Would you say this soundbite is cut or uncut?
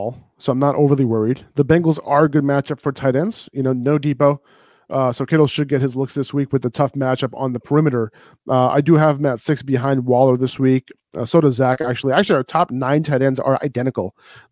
uncut